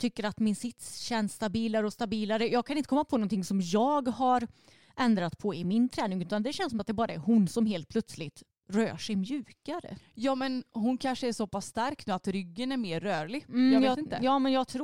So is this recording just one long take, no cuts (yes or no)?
yes